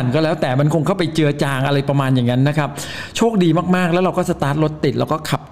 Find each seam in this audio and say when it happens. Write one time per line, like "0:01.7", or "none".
none

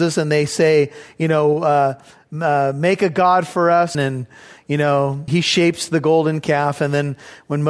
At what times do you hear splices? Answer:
0:03.9
0:05.3

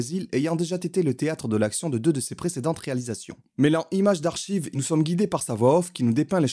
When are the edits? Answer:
0:04.7

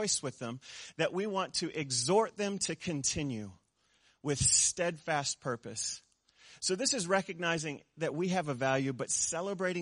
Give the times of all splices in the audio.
none

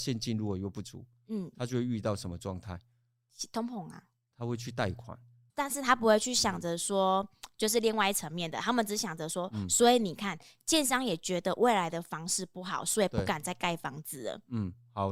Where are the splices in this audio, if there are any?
0:05.5

